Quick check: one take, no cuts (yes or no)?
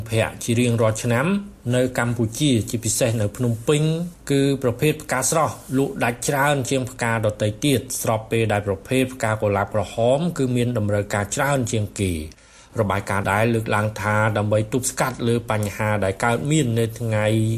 no